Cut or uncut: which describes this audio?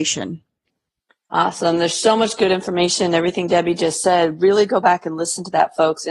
uncut